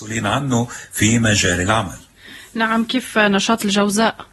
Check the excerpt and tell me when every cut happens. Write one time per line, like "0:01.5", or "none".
none